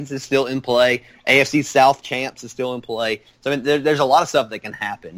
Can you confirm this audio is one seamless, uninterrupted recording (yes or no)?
yes